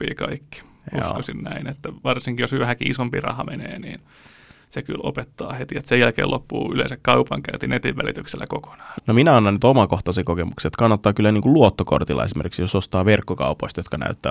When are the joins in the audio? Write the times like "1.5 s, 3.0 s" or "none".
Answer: 9.0 s